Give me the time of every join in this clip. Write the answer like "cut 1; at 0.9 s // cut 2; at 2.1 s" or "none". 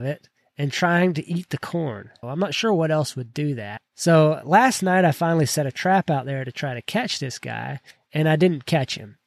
cut 1; at 2.2 s